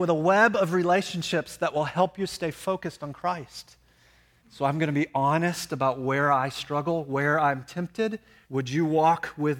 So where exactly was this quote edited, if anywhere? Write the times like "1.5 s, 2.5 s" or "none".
4.4 s, 8.4 s